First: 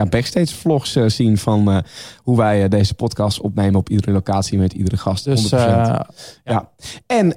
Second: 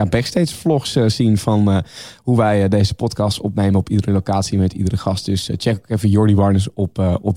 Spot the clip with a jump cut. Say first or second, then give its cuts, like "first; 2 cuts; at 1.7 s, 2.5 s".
first; 1 cut; at 5.2 s